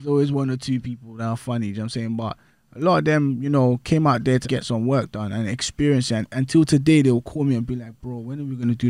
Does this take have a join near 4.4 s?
yes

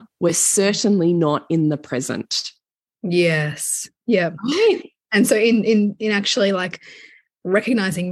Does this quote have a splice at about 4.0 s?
no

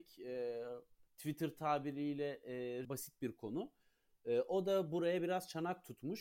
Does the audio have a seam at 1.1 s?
yes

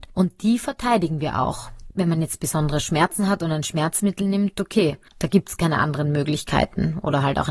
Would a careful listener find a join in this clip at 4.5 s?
no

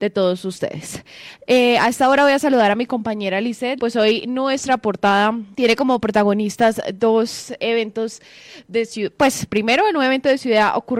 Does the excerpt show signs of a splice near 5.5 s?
yes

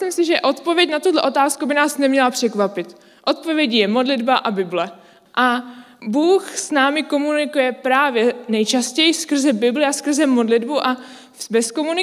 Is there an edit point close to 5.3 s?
yes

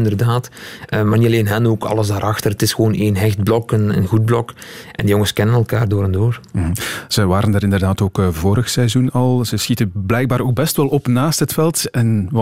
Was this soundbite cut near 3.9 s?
yes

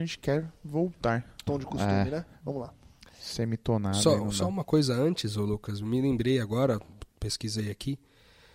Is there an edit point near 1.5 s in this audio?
yes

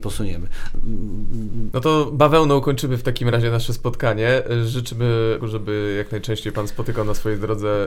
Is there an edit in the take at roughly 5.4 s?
yes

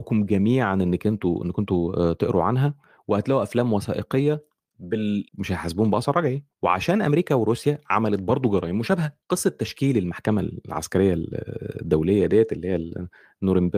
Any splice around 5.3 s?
yes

